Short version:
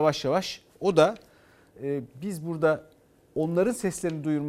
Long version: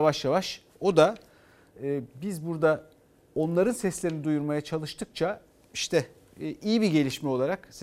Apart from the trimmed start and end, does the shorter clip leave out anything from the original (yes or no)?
no